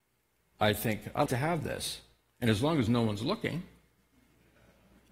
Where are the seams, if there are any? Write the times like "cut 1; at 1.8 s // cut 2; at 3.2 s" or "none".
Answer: cut 1; at 1.3 s